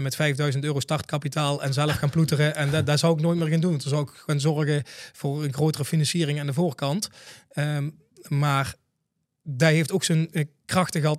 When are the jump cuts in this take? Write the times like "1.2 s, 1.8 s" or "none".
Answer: none